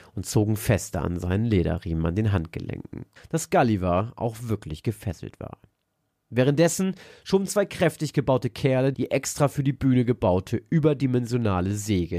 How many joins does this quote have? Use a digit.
2